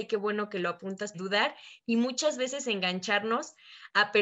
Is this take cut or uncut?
cut